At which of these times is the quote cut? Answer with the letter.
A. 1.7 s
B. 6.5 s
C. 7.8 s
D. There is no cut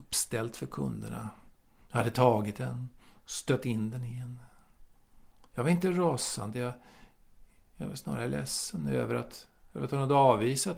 D